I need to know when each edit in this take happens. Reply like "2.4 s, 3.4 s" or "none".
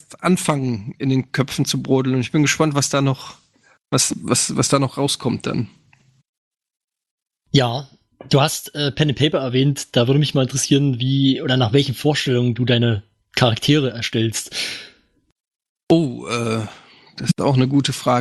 none

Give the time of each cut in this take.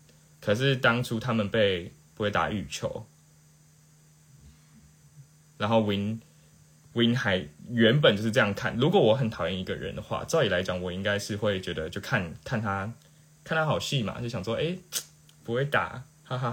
2.1 s

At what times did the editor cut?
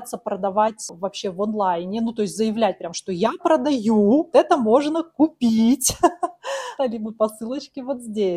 4.3 s, 6.8 s

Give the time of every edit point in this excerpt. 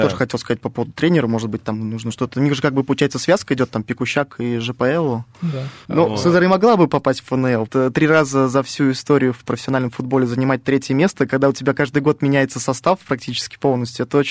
5.9 s, 7.7 s

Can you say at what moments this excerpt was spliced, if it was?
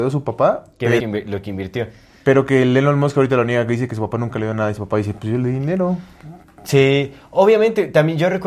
1.0 s

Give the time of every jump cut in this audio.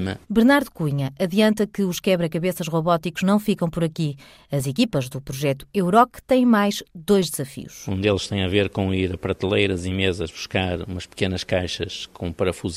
none

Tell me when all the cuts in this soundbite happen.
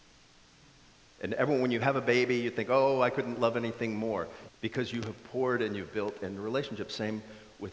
1.1 s, 4.5 s

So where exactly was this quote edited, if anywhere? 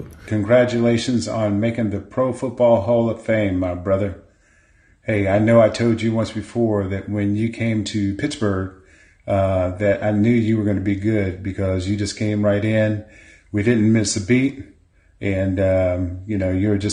none

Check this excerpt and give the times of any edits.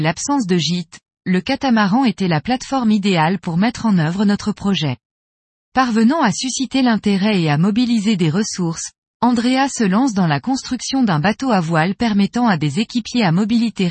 5.6 s

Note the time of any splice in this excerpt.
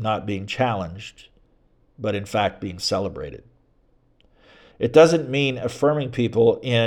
4.7 s

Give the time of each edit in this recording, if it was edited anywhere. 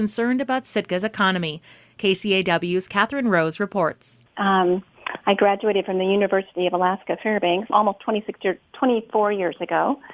4.3 s, 7.7 s

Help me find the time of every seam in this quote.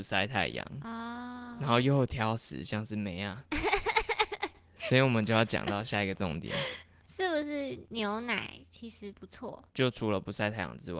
7.0 s, 9.7 s

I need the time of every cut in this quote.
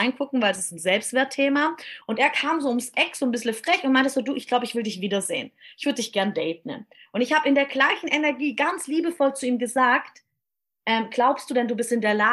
2.0 s

